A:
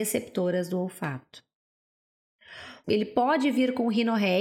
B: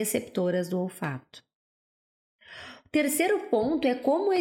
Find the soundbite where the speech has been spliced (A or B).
A